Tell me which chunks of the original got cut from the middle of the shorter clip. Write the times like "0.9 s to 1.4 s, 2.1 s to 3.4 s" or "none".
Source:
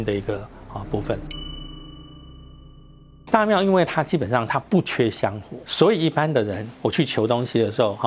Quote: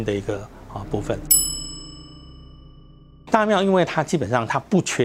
none